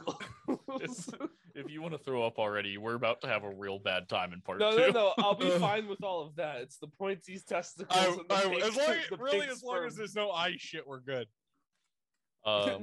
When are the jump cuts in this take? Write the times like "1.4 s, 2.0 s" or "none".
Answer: none